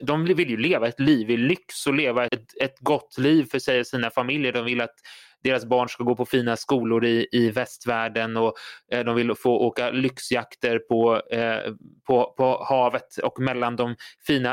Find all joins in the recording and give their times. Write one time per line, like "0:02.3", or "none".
0:02.3